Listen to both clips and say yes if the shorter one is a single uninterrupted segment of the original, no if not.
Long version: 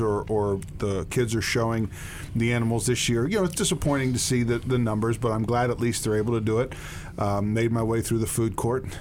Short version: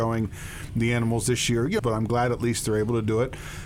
no